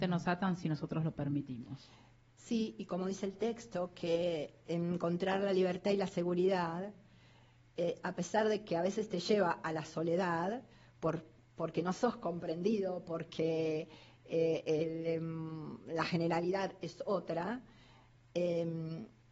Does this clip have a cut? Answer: no; 0 cuts

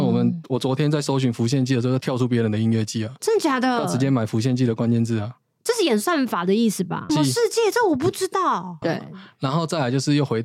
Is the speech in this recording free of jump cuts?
no; 2 cuts; at 7.1 s, 8.8 s

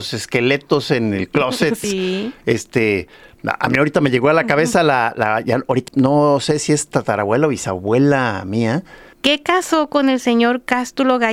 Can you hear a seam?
yes; 3 cuts; at 1.8 s, 5.9 s, 9.1 s

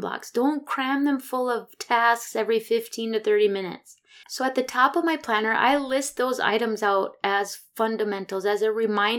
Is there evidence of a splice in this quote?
yes; 1 cut; at 4.2 s

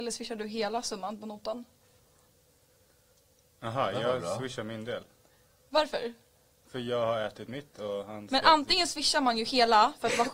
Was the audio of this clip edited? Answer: no; 0 cuts

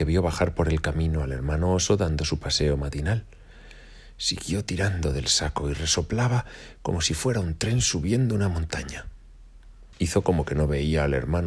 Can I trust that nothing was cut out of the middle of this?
no; 1 cut; at 9.9 s

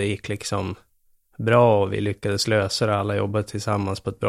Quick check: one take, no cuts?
yes; 0 cuts

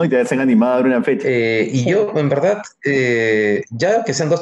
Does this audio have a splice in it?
yes; 1 cut; at 1.2 s

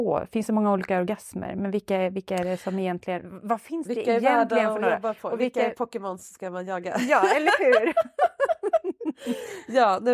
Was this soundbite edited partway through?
no; 0 cuts

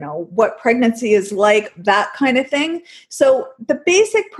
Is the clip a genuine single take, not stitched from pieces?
yes; 0 cuts

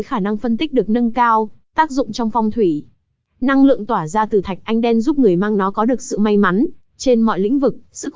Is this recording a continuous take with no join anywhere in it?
no; 1 cut; at 1.6 s

